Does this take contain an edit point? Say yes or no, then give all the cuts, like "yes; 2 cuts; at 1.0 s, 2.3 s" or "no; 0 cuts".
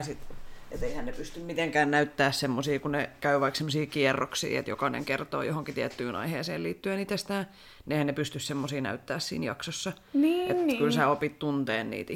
no; 0 cuts